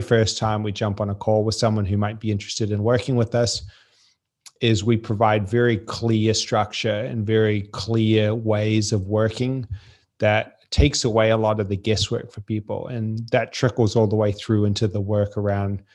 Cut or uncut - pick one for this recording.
uncut